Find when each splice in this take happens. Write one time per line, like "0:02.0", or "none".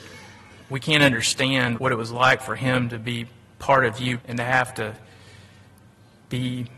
0:01.8
0:04.2